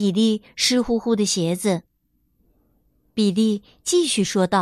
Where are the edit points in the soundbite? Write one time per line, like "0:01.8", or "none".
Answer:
none